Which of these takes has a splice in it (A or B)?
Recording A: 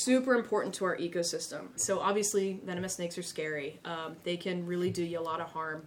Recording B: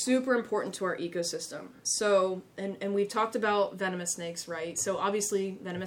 A